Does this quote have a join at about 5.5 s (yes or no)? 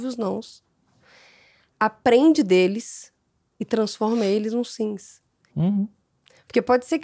yes